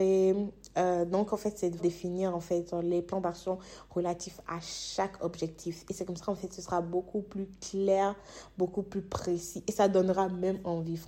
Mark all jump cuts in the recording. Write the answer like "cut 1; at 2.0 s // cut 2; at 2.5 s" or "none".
cut 1; at 1.8 s